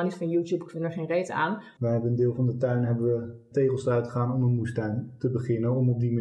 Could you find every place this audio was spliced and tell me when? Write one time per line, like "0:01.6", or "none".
0:01.8
0:03.5